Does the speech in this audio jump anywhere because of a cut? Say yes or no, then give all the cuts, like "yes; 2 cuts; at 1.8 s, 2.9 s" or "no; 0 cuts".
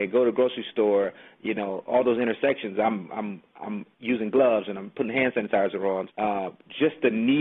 yes; 2 cuts; at 3.9 s, 6.1 s